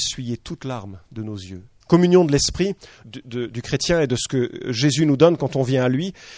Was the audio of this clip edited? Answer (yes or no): yes